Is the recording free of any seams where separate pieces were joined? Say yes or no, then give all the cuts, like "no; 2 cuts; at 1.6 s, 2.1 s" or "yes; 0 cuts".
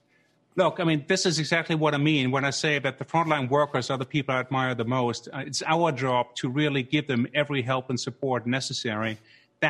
yes; 0 cuts